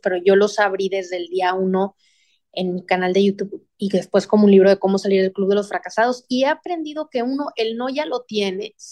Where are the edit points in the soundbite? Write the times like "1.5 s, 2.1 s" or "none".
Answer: none